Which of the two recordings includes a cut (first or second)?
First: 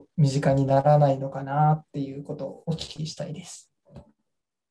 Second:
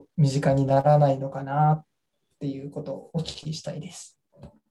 first